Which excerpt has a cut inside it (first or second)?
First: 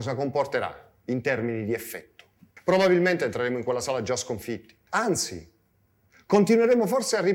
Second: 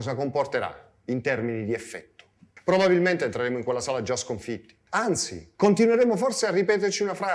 second